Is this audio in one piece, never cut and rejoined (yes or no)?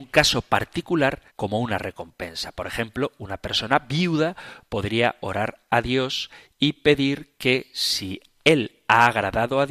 no